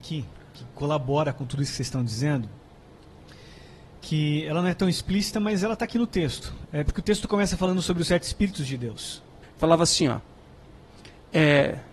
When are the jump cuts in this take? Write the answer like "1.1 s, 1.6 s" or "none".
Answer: 6.6 s, 9.4 s